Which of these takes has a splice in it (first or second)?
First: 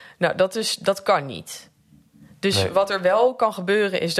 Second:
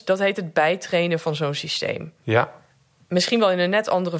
second